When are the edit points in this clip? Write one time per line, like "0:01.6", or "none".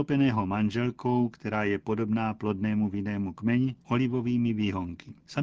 0:03.8